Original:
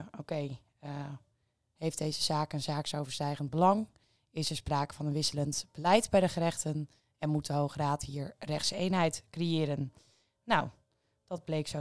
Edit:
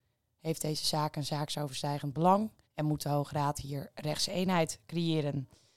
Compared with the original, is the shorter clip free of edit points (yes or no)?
no